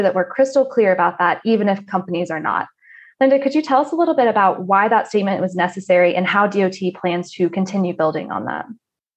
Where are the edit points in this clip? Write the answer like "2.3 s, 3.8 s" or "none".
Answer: none